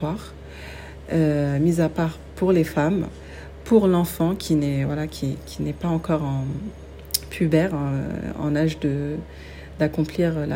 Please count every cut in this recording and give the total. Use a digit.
0